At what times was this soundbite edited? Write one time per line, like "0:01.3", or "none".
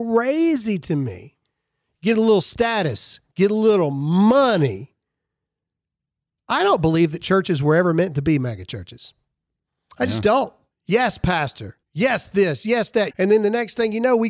0:10.7
0:11.8
0:13.1